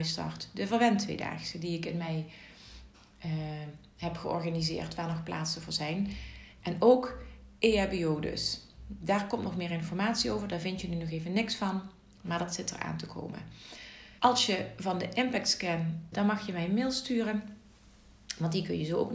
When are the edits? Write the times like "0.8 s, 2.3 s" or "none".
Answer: 14.2 s, 16.1 s